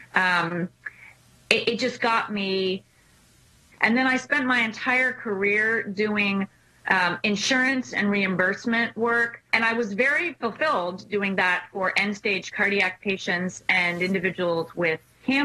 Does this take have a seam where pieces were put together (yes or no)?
yes